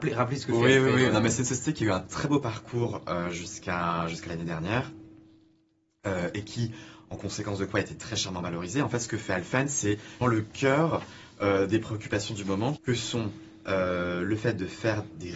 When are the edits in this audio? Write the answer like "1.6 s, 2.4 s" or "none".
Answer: 10.2 s, 12.8 s